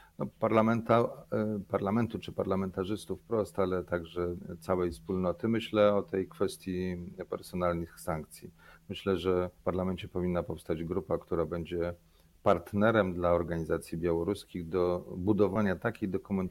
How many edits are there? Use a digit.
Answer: 1